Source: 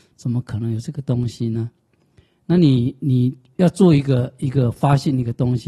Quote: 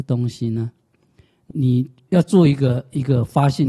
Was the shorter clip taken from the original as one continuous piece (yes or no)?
no